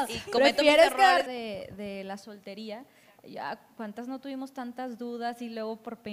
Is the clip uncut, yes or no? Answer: no